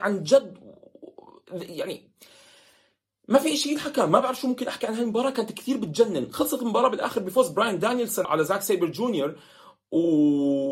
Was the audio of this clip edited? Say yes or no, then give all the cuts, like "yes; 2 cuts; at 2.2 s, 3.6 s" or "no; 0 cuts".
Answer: yes; 1 cut; at 8.2 s